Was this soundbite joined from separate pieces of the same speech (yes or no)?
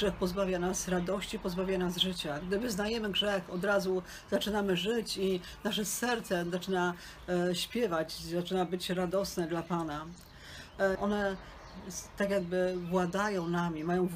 yes